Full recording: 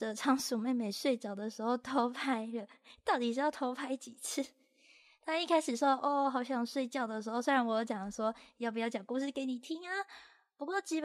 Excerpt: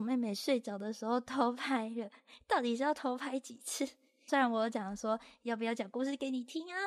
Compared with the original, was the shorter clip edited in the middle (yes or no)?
yes